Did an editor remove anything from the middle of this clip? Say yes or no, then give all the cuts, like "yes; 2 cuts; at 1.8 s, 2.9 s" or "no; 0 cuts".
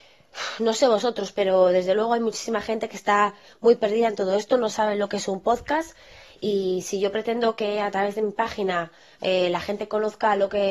no; 0 cuts